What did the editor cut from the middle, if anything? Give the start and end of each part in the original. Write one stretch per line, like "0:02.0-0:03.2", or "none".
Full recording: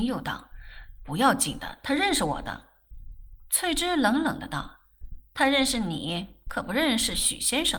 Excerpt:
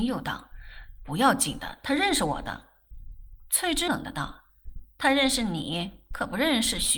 0:03.9-0:04.2